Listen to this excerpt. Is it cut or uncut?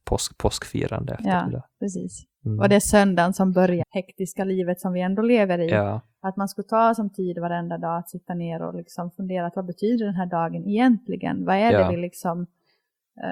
cut